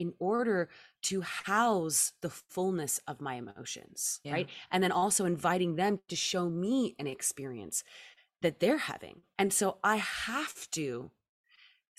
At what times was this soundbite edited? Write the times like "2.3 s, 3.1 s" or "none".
4.2 s, 9.4 s